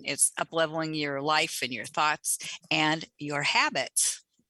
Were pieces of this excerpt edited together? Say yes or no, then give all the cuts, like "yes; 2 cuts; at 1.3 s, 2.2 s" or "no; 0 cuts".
no; 0 cuts